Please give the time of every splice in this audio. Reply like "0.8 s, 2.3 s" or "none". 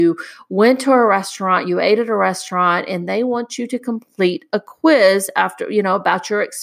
none